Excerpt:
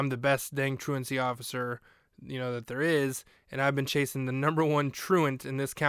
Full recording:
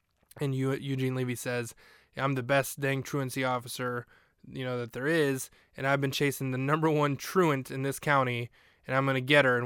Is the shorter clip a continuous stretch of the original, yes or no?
yes